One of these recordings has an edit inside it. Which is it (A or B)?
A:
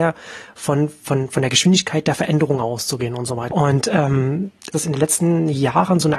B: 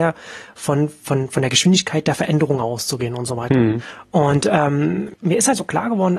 A